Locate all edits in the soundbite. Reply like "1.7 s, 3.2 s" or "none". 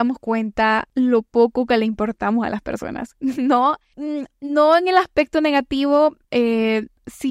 6.2 s